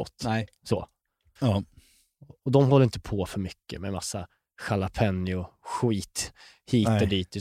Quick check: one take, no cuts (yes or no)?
no